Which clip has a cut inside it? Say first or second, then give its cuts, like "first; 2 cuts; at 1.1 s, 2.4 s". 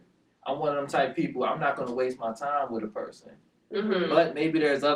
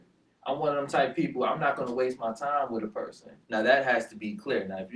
second; 1 cut; at 3.4 s